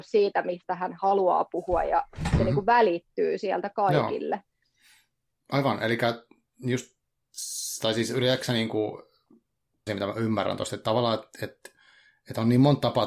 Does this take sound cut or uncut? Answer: cut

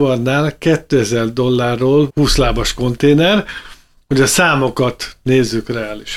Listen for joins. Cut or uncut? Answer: cut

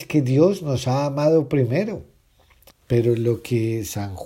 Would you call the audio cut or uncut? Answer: cut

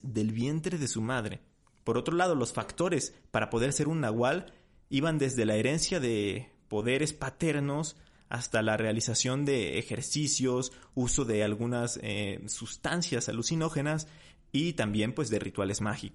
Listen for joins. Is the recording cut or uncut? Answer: uncut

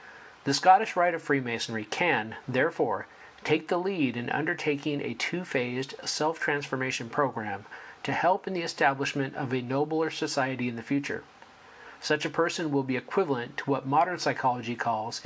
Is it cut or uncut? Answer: cut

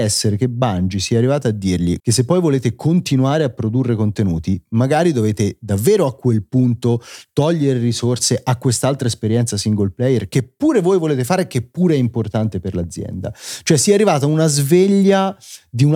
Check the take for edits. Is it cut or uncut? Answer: cut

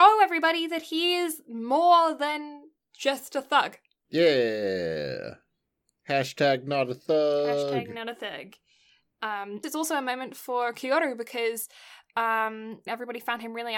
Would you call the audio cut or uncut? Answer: cut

